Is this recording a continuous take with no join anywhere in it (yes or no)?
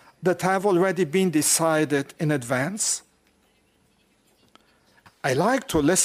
no